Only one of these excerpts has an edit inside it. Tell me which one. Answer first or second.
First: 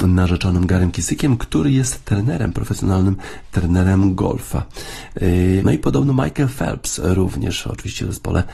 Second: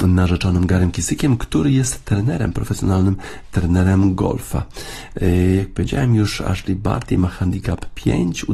first